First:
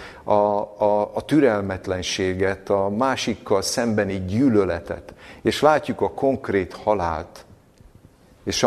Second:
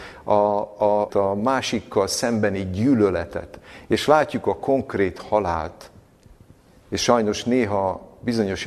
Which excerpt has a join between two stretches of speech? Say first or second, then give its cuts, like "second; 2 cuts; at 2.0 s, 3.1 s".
second; 1 cut; at 1.1 s